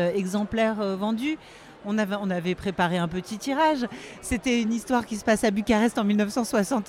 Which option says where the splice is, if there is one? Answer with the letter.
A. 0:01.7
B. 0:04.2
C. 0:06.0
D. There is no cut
D